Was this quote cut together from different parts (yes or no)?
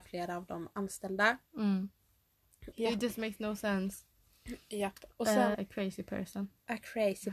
yes